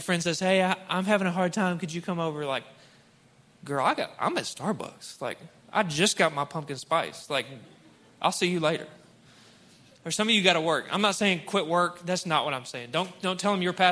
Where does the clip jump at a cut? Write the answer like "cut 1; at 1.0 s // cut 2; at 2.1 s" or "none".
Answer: none